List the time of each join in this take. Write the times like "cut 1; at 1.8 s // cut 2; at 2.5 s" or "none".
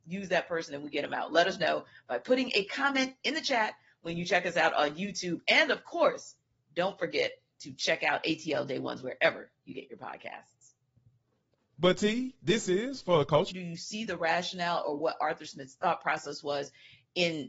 cut 1; at 13.5 s